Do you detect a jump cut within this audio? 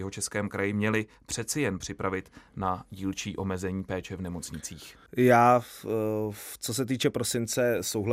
yes; 1 cut; at 5.1 s

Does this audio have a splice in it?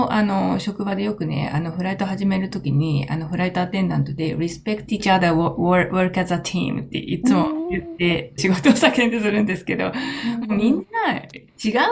yes; 1 cut; at 8.4 s

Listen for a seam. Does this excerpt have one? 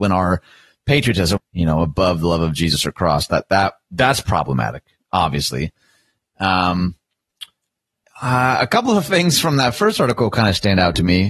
yes; 1 cut; at 1.4 s

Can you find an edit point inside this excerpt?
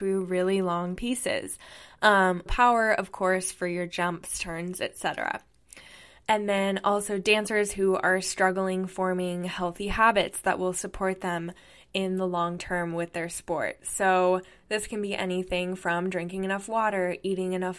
yes; 1 cut; at 2.5 s

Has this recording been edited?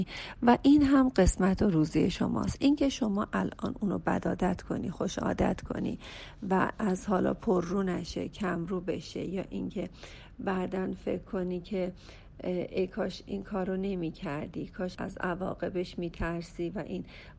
yes; 1 cut; at 14.9 s

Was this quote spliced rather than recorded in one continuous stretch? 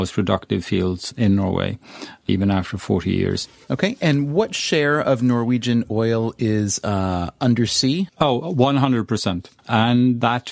yes; 1 cut; at 9.6 s

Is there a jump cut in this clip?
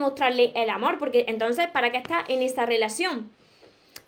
no; 0 cuts

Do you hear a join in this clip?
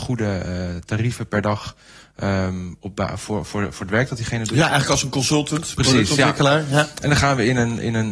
no; 0 cuts

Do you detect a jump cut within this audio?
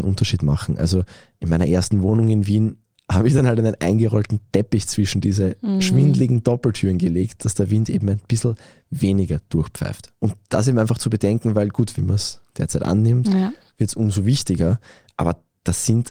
yes; 1 cut; at 11.9 s

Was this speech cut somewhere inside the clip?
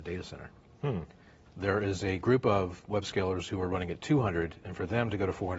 yes; 1 cut; at 1.5 s

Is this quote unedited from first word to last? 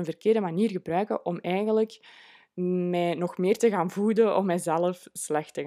yes; 0 cuts

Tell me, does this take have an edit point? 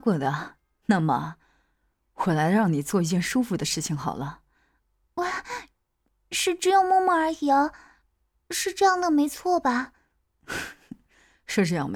no; 0 cuts

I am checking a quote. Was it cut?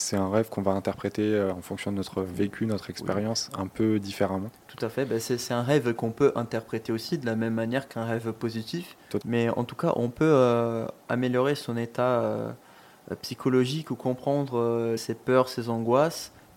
yes; 2 cuts; at 9.2 s, 15.0 s

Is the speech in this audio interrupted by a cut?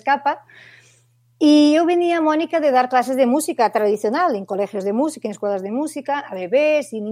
no; 0 cuts

